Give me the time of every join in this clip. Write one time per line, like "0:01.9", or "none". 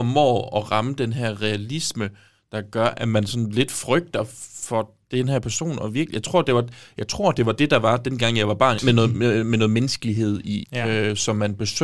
0:08.8
0:10.6